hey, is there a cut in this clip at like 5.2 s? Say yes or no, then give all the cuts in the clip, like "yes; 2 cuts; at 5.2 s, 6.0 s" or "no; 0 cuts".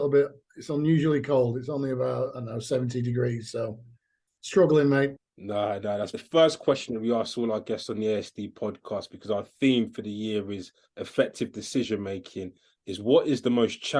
yes; 1 cut; at 5.2 s